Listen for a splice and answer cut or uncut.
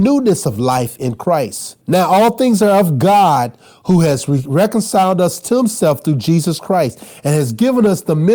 cut